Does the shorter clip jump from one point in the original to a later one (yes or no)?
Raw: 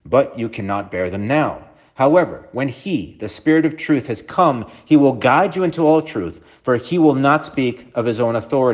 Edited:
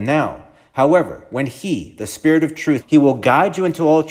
yes